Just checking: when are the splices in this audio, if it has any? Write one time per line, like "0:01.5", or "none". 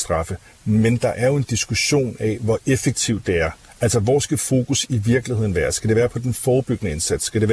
none